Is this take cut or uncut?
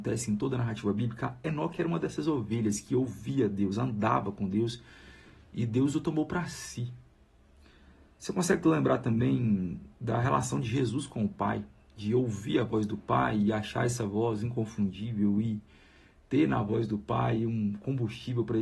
uncut